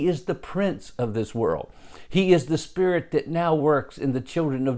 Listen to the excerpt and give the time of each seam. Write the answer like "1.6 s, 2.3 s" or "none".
none